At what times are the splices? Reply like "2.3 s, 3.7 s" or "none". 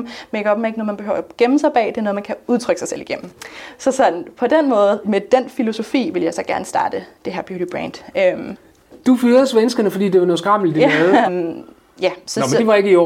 5.0 s, 11.3 s

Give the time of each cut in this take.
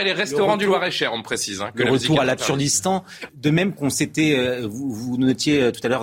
3.3 s

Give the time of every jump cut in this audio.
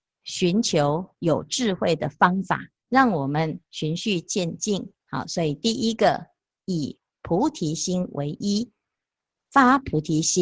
2.8 s, 5.0 s

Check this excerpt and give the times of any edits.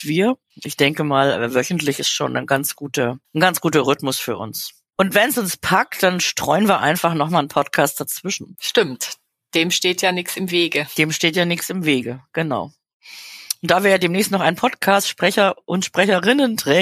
none

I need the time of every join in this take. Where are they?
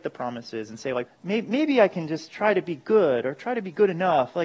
1.1 s

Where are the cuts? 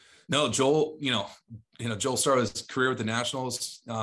none

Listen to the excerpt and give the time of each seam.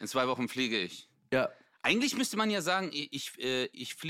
none

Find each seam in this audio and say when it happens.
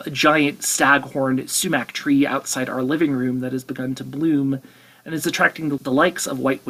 5.8 s

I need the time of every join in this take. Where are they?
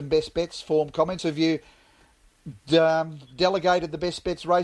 none

